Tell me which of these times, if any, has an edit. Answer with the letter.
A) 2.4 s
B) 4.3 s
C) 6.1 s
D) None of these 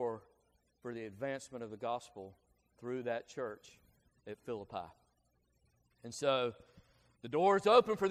D